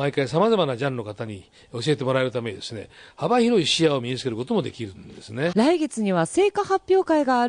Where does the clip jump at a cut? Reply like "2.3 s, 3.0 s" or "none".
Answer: 5.5 s